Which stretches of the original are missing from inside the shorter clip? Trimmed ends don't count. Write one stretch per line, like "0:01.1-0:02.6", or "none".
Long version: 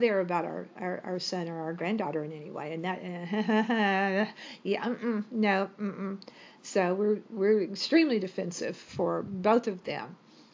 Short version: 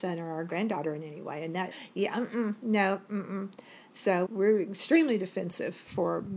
0:03.0-0:04.4
0:06.9-0:07.3